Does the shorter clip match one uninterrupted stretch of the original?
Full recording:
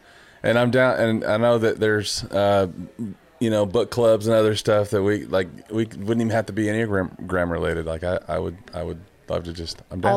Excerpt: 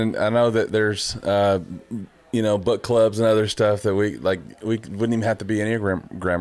yes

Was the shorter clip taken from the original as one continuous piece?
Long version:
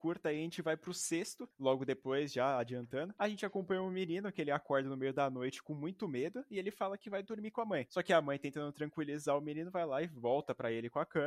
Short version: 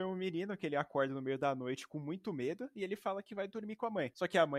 yes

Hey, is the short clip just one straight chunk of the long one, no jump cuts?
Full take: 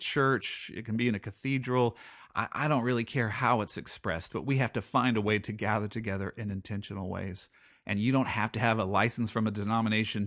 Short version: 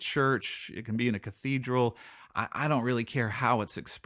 yes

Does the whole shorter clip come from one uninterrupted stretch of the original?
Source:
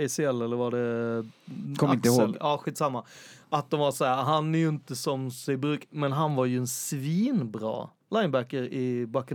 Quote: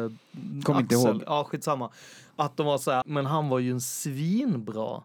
no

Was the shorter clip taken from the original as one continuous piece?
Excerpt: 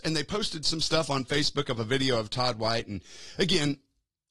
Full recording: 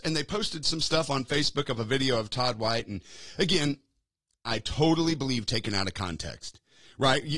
yes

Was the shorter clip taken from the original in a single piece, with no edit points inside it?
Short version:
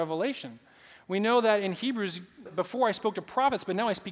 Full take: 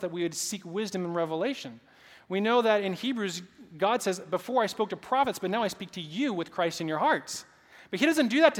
no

